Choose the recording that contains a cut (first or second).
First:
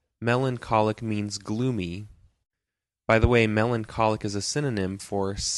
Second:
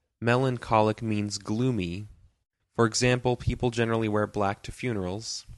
second